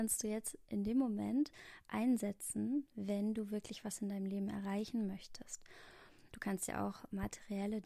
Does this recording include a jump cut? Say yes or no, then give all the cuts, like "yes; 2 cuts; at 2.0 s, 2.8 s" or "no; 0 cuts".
yes; 1 cut; at 6.3 s